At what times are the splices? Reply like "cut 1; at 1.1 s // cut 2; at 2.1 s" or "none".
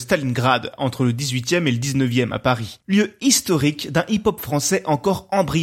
none